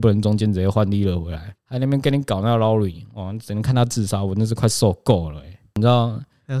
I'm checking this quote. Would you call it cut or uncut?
cut